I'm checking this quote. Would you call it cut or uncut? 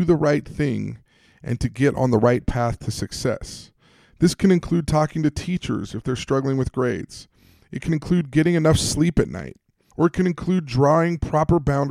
cut